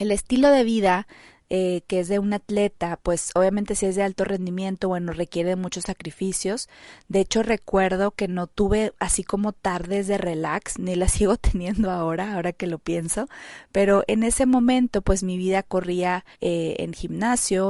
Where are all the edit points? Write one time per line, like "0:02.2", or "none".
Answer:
0:07.0
0:16.3